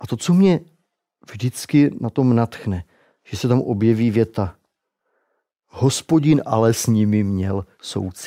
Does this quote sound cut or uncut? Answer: uncut